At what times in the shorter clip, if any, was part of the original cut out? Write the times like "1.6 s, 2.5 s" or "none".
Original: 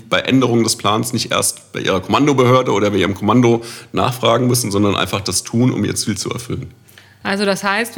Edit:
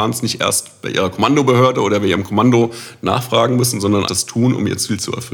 4.0 s